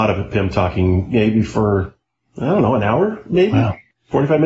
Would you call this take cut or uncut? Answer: uncut